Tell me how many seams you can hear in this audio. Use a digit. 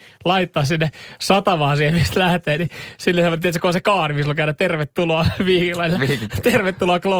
0